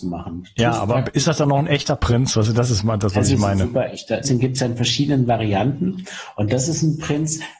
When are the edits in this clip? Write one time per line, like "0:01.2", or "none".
0:04.2